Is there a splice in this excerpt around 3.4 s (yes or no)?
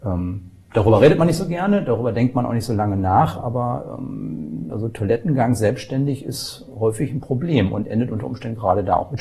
no